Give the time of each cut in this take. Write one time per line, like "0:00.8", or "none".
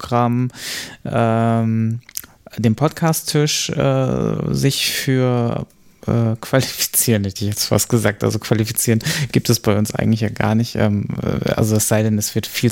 none